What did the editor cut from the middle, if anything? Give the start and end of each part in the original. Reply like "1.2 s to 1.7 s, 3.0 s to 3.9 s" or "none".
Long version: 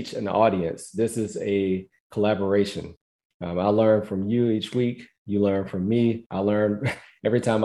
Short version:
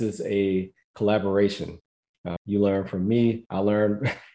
3.5 s to 5.2 s